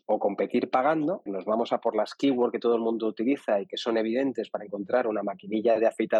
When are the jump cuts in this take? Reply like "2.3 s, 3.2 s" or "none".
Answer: 1.3 s